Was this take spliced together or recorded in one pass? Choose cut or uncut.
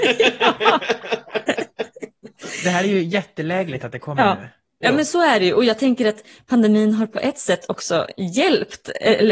uncut